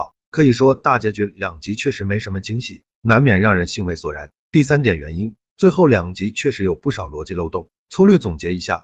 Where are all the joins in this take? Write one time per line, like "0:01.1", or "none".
0:04.4